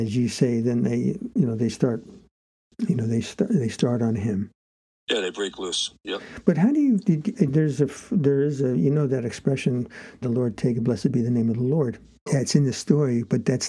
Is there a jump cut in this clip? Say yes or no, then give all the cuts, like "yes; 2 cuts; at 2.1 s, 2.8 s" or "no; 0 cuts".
yes; 2 cuts; at 10.2 s, 12.3 s